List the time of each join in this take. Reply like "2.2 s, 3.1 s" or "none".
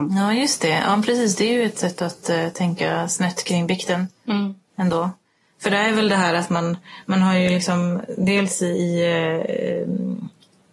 none